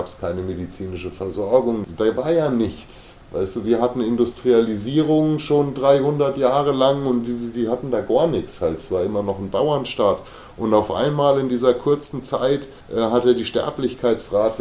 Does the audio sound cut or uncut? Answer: uncut